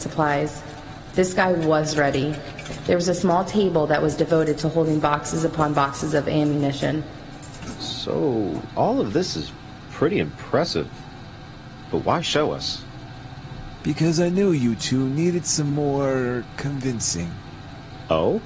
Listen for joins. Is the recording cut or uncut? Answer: uncut